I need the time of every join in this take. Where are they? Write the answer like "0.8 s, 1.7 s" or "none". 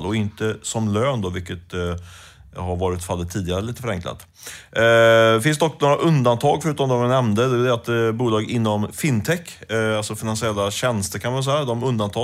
none